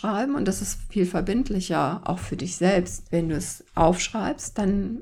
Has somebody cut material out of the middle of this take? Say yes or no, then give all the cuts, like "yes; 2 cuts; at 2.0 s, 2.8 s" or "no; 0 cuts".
no; 0 cuts